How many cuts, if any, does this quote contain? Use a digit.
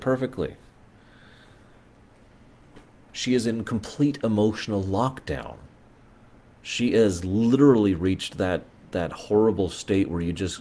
1